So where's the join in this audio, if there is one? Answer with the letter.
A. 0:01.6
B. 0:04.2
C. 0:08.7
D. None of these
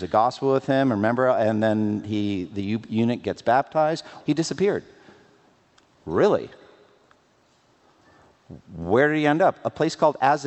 B